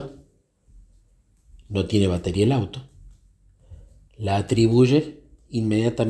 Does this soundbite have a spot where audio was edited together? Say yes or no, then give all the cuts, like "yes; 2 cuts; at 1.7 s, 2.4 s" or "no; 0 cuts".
no; 0 cuts